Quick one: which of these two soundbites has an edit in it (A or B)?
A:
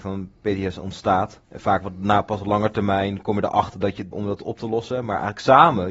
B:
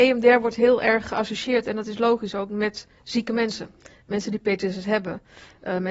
A